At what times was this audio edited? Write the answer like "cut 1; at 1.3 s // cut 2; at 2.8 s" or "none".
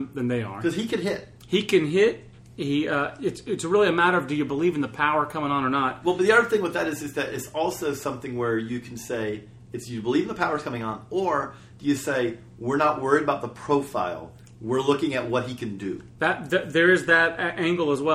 none